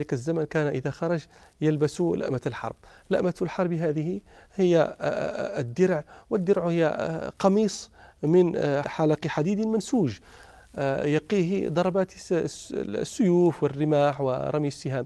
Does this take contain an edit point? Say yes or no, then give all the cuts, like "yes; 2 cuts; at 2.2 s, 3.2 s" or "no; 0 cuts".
yes; 1 cut; at 8.8 s